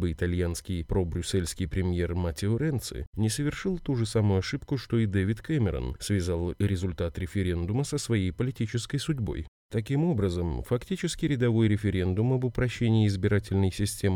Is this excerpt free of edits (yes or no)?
yes